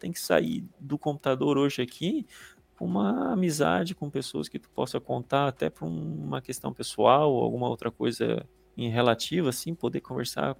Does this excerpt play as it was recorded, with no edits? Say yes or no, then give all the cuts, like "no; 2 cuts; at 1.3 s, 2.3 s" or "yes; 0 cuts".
yes; 0 cuts